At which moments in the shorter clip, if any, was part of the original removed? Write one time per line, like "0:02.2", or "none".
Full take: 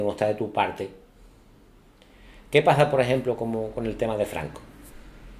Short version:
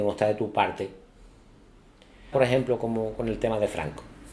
0:02.3